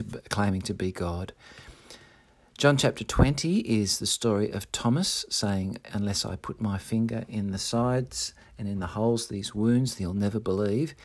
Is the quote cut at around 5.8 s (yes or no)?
no